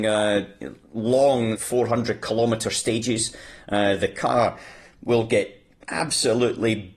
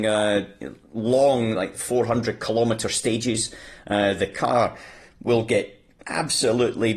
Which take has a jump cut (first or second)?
first